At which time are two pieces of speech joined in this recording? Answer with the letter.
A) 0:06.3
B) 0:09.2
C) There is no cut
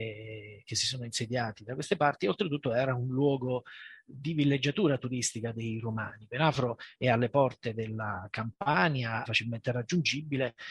B